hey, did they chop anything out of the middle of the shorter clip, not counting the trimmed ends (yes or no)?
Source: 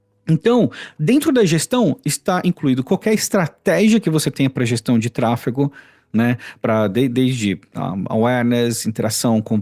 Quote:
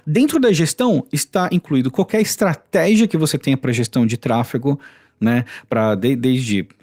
no